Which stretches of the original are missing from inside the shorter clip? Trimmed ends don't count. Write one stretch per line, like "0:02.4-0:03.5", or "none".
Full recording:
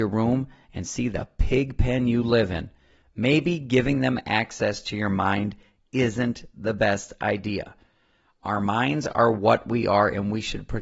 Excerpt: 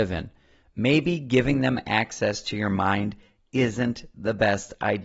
none